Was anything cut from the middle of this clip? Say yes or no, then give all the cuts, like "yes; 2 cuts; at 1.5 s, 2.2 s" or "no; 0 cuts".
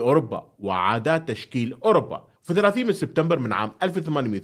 yes; 1 cut; at 2.4 s